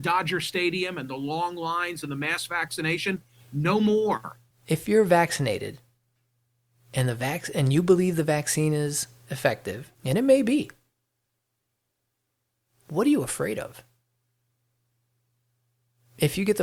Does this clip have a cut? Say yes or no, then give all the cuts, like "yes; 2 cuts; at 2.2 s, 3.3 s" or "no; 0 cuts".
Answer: yes; 2 cuts; at 4.5 s, 9.9 s